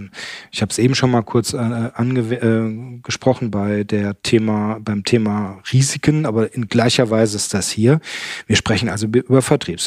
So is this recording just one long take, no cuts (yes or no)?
yes